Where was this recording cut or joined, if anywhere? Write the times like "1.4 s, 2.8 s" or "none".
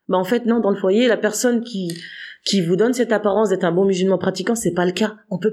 none